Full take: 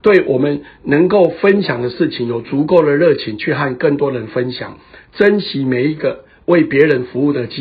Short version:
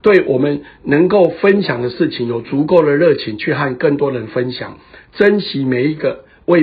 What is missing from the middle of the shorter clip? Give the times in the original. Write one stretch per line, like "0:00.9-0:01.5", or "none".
none